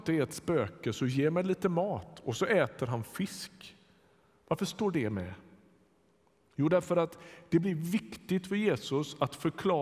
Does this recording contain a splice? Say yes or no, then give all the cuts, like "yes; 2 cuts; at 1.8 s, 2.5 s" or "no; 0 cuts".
no; 0 cuts